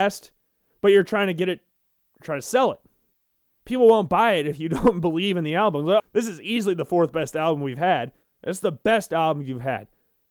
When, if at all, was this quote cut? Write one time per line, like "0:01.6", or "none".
0:06.0
0:08.2